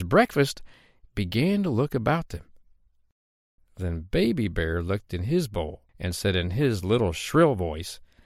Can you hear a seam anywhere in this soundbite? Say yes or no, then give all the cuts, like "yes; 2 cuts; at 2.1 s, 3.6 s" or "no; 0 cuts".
yes; 2 cuts; at 3.6 s, 5.9 s